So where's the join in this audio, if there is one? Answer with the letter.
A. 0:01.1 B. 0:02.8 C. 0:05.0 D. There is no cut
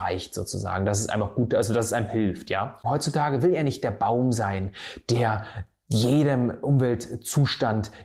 B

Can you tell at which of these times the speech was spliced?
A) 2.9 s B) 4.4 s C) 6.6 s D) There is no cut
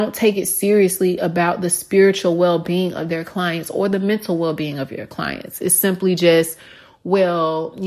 D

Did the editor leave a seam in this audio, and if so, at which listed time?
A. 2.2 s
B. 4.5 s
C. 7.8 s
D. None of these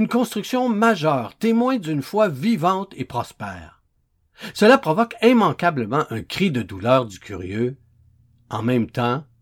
B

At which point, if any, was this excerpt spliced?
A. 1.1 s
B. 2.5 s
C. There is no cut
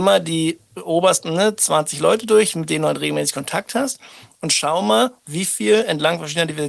C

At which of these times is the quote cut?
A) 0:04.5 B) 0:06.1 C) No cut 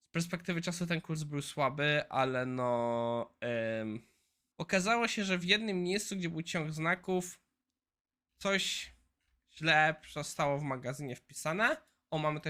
A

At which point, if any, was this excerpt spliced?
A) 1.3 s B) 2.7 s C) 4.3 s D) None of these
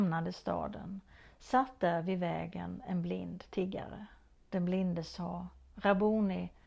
C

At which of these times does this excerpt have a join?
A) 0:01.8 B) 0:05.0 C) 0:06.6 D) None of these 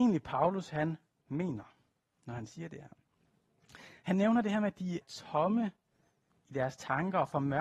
B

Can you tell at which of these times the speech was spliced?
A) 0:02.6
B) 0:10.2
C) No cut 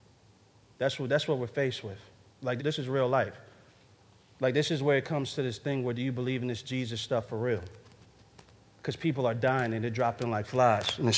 A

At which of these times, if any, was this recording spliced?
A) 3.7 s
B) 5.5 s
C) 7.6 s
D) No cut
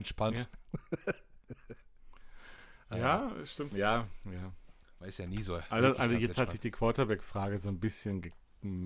A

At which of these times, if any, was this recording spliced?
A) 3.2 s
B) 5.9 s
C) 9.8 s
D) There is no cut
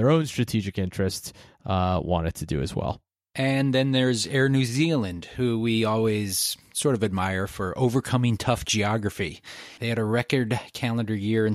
C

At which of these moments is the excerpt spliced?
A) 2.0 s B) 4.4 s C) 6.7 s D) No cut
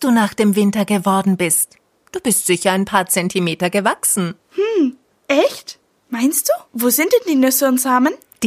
C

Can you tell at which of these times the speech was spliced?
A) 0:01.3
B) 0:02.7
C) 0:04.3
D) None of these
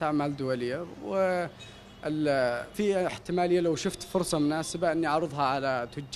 B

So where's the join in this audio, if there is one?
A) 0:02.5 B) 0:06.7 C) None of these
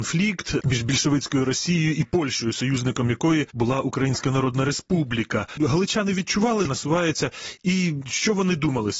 B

